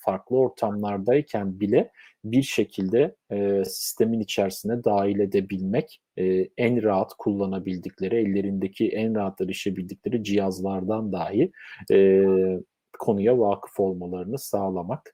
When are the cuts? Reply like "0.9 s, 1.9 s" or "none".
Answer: none